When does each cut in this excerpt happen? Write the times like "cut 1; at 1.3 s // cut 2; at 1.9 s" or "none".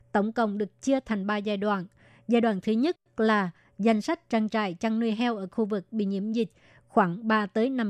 none